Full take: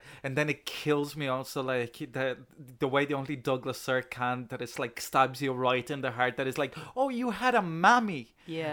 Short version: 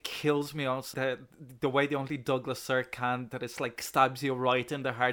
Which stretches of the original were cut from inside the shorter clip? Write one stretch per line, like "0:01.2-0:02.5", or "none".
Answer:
0:01.6-0:02.1